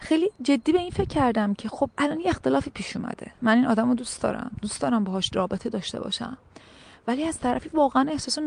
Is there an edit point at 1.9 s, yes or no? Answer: yes